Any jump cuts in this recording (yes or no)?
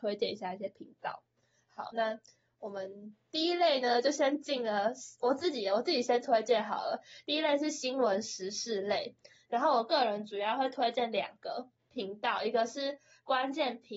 no